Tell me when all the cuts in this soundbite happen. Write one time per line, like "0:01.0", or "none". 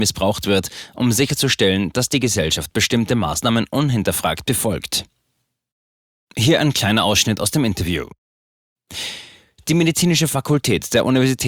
none